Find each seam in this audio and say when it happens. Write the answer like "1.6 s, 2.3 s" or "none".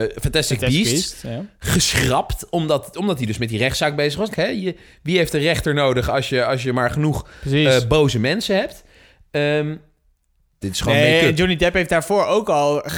4.3 s, 10.6 s